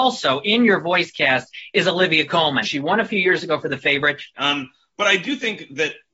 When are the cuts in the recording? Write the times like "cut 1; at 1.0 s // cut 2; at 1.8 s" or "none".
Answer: cut 1; at 2.6 s // cut 2; at 4.3 s